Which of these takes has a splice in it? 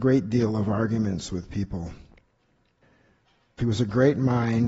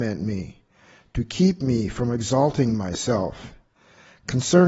first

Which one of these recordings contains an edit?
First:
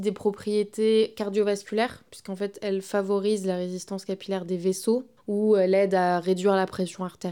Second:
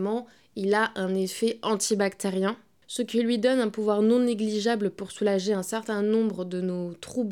first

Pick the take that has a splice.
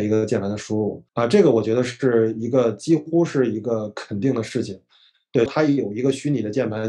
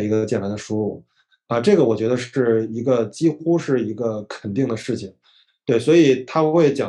first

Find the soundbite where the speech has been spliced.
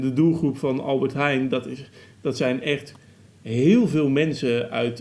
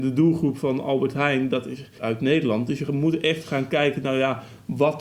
second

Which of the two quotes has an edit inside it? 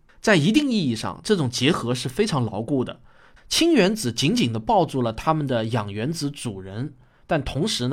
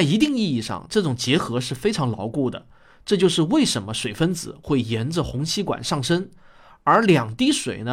first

